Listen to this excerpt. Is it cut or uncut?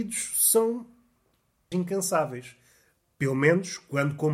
cut